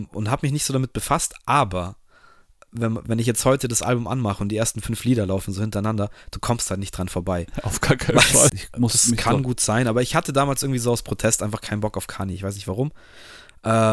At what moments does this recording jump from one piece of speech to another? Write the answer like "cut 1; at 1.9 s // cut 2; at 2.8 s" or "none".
cut 1; at 8.5 s